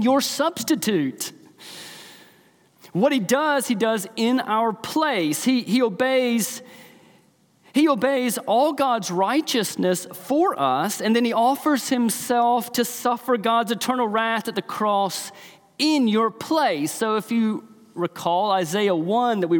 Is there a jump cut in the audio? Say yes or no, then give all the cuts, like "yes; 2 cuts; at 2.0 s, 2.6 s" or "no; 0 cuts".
no; 0 cuts